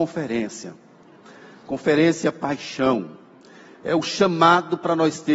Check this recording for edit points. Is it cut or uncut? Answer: uncut